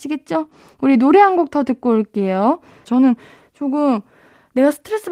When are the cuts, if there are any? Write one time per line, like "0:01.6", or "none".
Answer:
0:02.8